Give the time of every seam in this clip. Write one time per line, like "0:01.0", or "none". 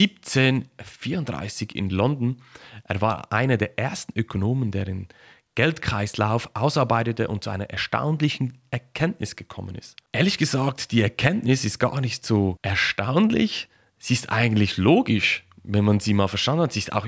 none